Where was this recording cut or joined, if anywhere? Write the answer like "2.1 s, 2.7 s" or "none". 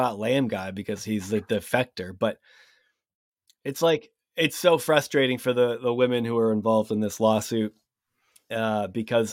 none